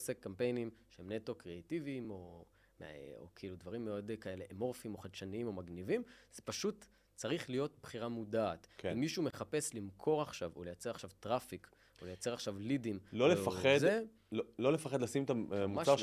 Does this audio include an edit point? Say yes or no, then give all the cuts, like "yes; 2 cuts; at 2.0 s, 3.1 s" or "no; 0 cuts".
no; 0 cuts